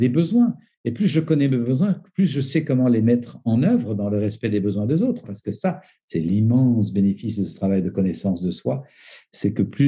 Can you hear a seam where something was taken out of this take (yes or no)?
no